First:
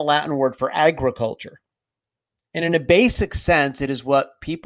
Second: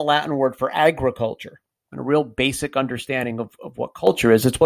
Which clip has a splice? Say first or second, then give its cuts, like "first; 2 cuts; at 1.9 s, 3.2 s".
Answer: second; 1 cut; at 1.8 s